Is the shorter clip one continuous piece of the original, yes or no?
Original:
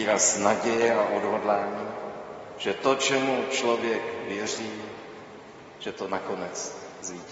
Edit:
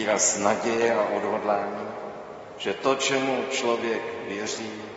yes